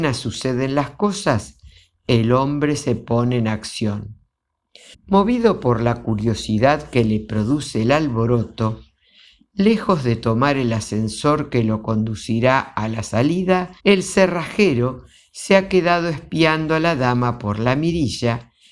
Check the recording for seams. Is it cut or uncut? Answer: cut